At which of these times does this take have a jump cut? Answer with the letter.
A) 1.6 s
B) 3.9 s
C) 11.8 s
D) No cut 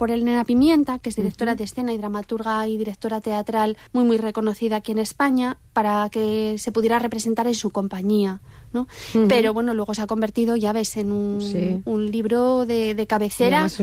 B